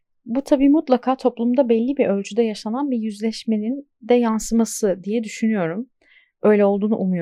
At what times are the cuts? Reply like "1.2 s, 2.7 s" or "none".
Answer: none